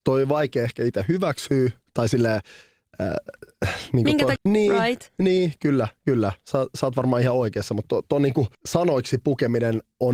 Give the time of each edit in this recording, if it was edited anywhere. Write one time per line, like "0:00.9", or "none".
0:04.4
0:08.5